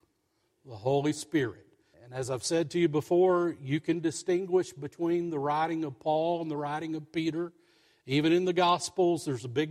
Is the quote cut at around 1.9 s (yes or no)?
yes